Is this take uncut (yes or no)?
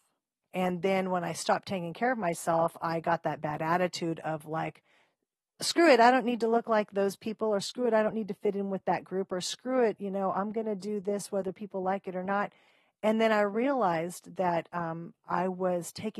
yes